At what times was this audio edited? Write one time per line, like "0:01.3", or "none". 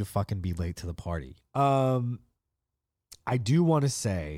0:01.4